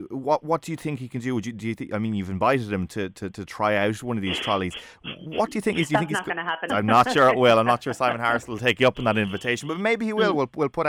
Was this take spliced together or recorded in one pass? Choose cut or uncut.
cut